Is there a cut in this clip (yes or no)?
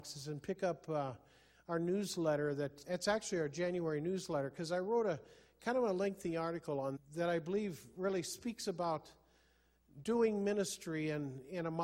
yes